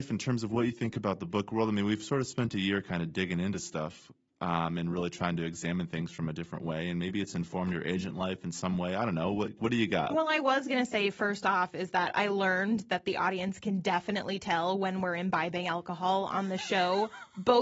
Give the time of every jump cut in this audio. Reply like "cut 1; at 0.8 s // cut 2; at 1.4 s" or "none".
cut 1; at 10.1 s